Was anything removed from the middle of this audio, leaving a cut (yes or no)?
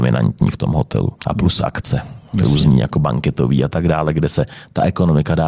yes